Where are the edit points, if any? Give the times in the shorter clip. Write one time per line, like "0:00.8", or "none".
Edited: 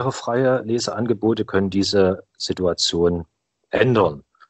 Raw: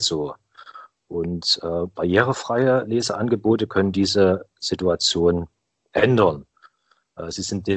none